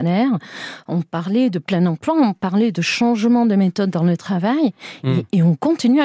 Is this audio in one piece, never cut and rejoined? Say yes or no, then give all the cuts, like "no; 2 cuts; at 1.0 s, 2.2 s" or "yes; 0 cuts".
yes; 0 cuts